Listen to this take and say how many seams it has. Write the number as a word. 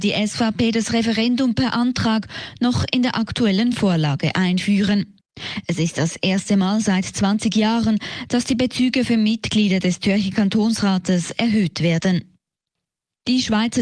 zero